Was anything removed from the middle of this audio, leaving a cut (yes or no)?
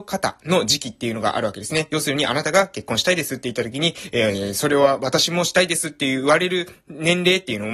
no